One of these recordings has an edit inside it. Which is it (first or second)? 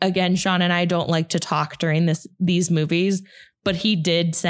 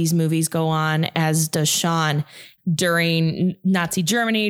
second